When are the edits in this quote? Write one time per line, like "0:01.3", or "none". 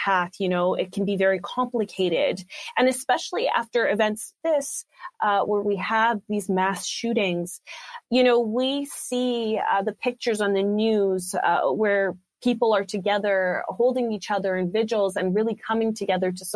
0:04.4
0:08.0